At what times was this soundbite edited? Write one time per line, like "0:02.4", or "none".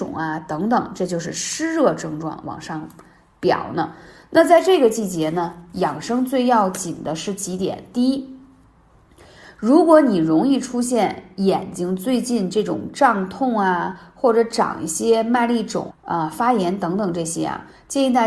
0:15.9

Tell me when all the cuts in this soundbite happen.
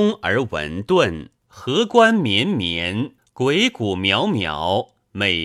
0:01.4
0:03.2

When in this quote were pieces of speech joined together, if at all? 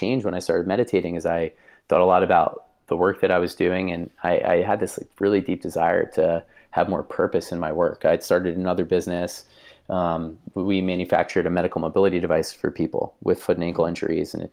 none

